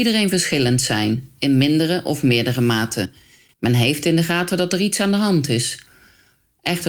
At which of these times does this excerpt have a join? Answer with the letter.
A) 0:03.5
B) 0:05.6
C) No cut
A